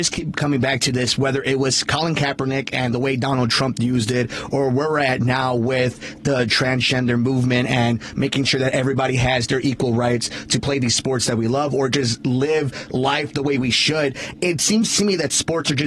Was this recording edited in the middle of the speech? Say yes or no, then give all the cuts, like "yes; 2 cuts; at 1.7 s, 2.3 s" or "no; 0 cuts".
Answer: no; 0 cuts